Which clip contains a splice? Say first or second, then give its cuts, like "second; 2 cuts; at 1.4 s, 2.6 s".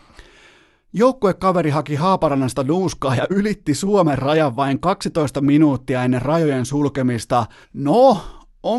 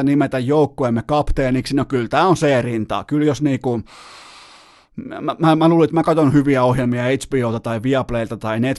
first; 1 cut; at 7.6 s